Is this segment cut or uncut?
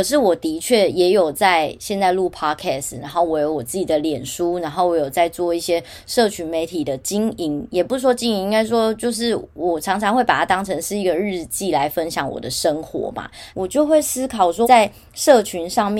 cut